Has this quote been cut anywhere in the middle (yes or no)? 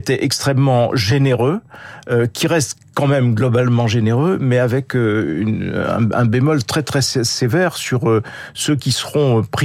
no